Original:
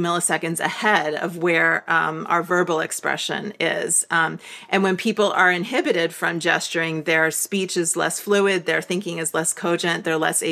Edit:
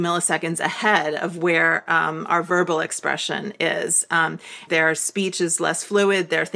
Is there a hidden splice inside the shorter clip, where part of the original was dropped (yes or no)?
yes